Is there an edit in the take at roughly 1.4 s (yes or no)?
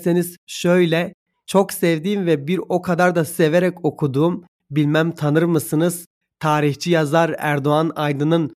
yes